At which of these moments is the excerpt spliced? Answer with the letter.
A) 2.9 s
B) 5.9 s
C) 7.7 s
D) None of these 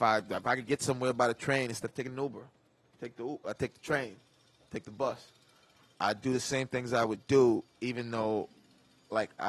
C